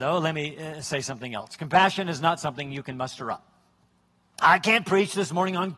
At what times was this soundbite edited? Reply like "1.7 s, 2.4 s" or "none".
none